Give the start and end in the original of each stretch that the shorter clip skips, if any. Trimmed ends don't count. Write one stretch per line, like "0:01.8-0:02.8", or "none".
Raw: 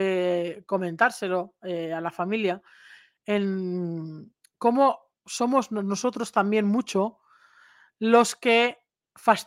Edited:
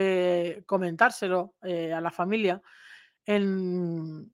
none